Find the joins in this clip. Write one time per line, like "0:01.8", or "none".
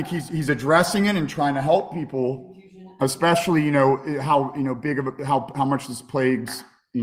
none